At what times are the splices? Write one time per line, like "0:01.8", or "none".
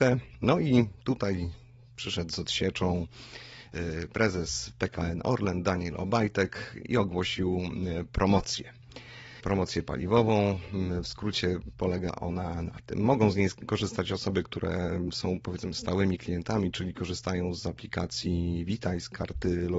none